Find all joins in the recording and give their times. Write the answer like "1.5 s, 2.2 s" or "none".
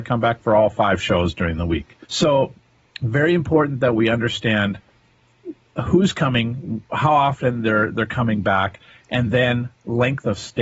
2.0 s